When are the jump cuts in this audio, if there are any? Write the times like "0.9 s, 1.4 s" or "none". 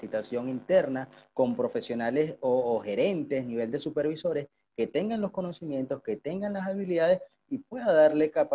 none

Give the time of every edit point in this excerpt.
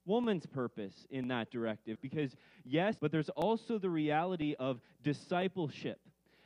2.0 s, 3.0 s

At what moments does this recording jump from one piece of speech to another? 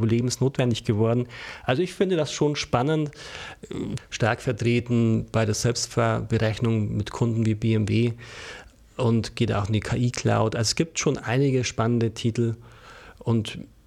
4.0 s

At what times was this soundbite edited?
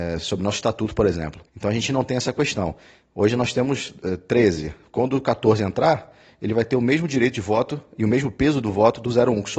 1.5 s

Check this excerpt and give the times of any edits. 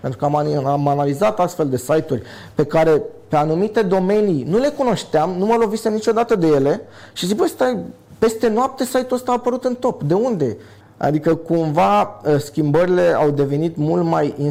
10.8 s

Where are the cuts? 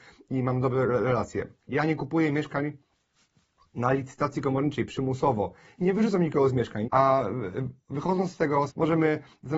6.8 s, 8.7 s

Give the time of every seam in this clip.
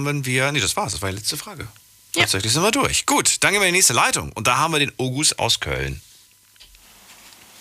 none

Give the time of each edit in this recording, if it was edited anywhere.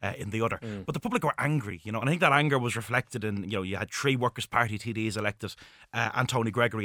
none

